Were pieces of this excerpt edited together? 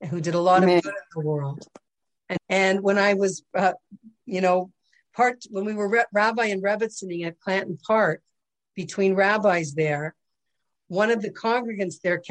yes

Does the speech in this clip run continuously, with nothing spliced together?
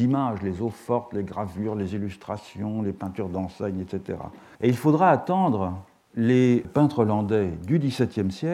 no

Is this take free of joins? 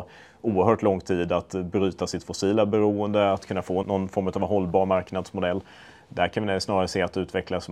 no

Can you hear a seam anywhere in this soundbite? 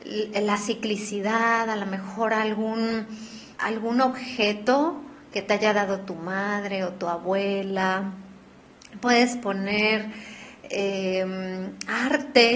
yes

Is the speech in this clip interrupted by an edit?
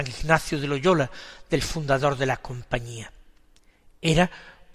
no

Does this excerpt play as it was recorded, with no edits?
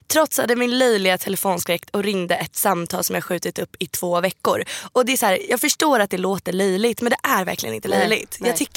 yes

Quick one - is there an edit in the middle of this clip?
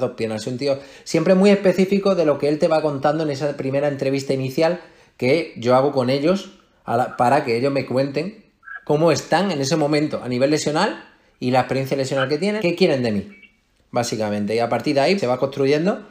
yes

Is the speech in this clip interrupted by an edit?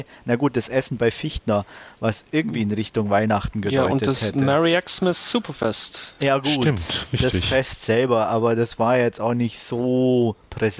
no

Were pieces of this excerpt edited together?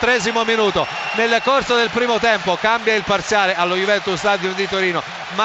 no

